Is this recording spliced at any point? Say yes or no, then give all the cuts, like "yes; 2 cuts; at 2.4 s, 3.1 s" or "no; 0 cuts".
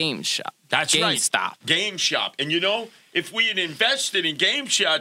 no; 0 cuts